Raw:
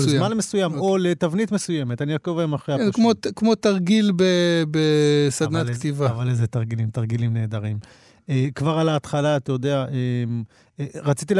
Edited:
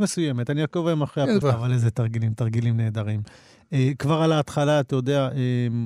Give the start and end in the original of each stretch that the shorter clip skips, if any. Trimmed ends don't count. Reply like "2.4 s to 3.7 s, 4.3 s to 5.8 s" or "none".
2.9 s to 6.0 s